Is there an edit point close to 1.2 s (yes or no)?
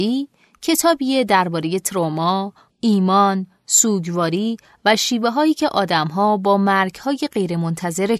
no